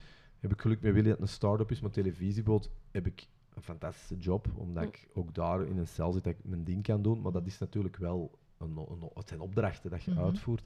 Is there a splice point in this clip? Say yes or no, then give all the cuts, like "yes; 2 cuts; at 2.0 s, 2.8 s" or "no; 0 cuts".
no; 0 cuts